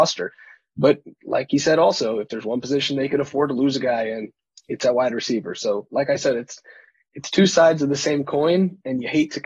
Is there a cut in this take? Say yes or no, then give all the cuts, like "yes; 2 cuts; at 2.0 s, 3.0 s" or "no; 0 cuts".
no; 0 cuts